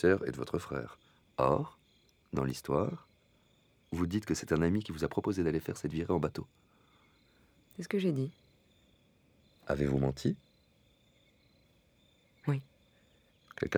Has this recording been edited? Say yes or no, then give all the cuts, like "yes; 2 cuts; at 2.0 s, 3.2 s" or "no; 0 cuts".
no; 0 cuts